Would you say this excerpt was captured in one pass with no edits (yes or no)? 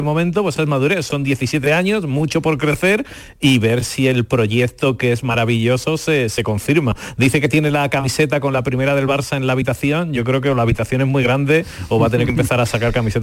yes